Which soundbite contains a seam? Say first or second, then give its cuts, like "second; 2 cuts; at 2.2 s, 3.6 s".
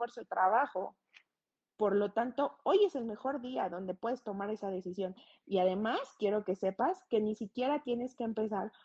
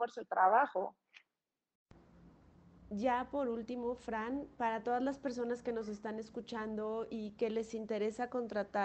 first; 1 cut; at 1.7 s